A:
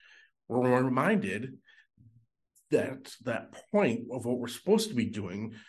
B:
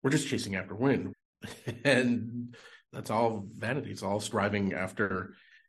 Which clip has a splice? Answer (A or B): B